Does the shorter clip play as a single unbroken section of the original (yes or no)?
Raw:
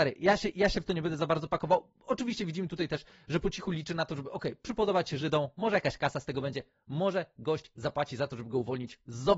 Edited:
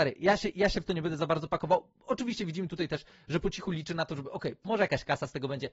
no